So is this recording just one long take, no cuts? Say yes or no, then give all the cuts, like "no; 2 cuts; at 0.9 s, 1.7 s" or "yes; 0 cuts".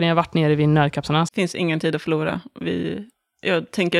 no; 1 cut; at 1.3 s